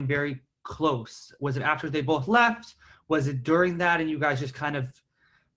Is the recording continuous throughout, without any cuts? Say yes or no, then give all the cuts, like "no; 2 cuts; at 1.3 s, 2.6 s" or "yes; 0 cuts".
yes; 0 cuts